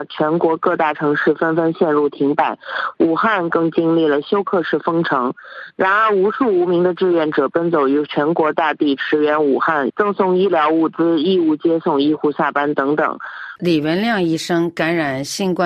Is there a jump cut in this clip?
yes; 2 cuts; at 9.9 s, 13.6 s

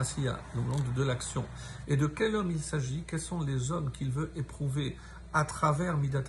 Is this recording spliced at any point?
yes; 1 cut; at 1.8 s

